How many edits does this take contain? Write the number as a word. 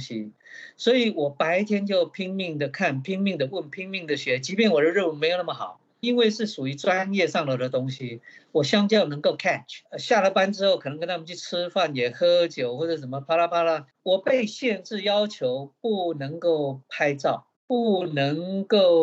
three